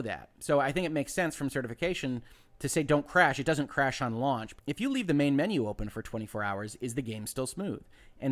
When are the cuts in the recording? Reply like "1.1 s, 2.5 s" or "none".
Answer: 4.6 s